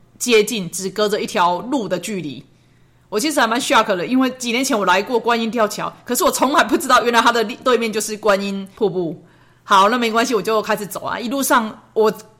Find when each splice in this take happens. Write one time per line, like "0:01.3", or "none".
none